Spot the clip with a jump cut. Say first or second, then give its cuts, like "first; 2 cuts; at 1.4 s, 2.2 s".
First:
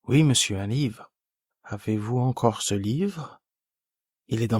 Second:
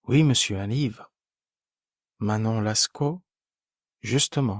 first; 1 cut; at 1.5 s